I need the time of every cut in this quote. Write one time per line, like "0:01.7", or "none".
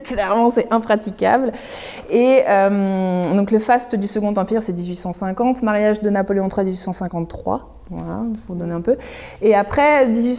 none